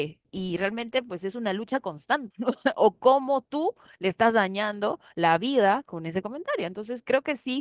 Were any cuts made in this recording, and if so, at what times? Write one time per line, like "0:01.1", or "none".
0:02.3

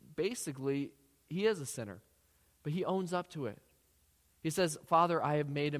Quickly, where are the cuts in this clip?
none

